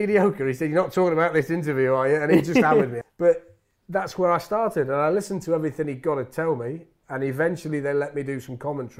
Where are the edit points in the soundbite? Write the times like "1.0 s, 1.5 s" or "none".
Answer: 3.0 s